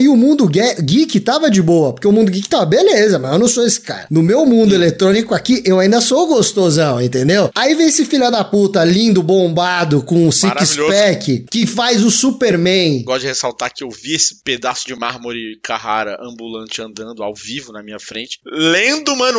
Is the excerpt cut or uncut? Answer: cut